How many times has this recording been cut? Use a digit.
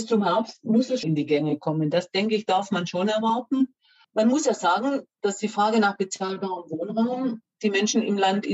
2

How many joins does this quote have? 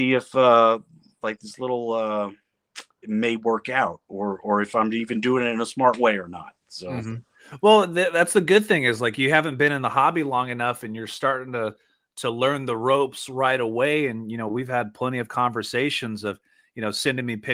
1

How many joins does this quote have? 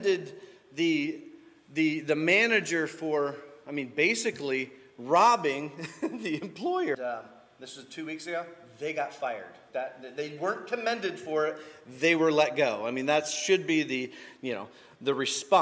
2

